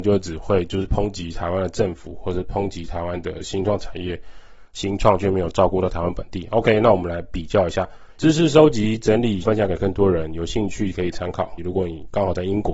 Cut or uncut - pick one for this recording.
cut